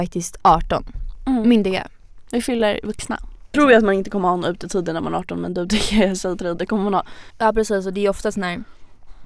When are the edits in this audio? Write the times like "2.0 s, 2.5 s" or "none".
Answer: 3.5 s, 7.3 s